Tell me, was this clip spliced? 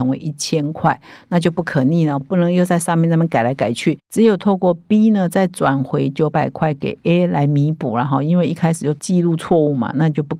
yes; 1 cut; at 2.2 s

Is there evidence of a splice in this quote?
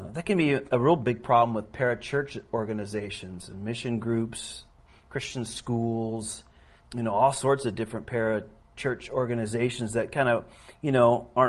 yes; 1 cut; at 6.8 s

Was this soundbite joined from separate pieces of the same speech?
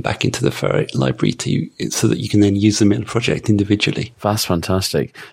no; 0 cuts

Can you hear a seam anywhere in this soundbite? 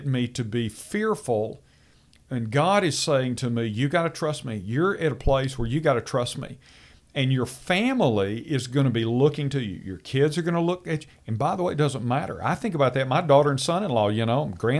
no; 0 cuts

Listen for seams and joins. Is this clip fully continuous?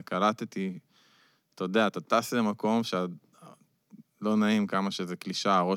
yes; 0 cuts

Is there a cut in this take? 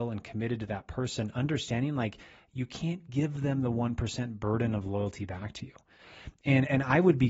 no; 0 cuts

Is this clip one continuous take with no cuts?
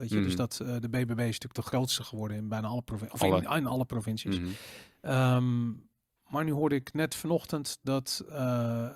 yes; 0 cuts

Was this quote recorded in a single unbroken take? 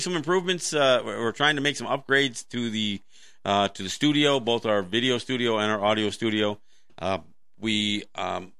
yes; 0 cuts

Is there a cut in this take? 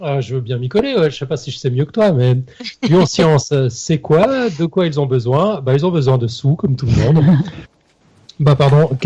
yes; 1 cut; at 7.6 s

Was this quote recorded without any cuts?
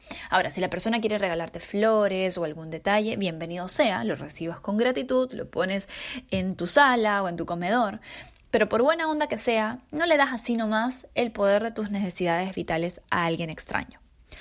yes; 0 cuts

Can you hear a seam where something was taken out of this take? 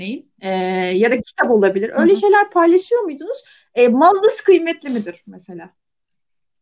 no; 0 cuts

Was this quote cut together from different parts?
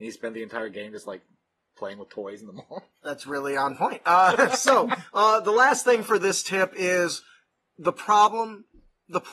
no; 0 cuts

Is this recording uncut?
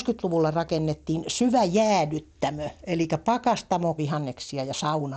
no; 1 cut; at 4.0 s

